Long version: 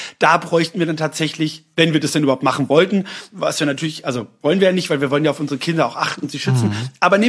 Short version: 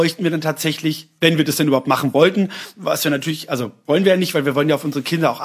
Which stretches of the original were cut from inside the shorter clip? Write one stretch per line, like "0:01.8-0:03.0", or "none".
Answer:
none